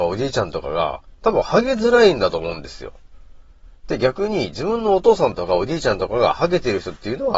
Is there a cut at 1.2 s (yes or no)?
yes